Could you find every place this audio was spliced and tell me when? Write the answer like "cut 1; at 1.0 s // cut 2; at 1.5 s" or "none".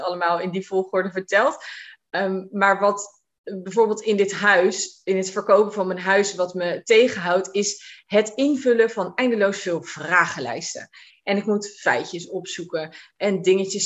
none